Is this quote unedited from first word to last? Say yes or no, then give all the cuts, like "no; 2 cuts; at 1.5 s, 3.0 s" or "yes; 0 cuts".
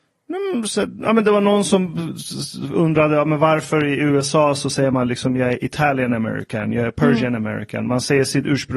yes; 0 cuts